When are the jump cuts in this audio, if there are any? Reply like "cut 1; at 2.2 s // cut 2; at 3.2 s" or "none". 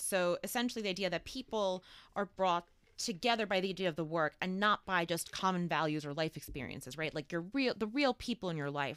none